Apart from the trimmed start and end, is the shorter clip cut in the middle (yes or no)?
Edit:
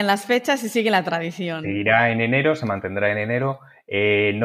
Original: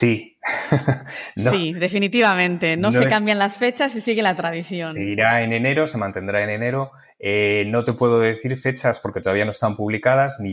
no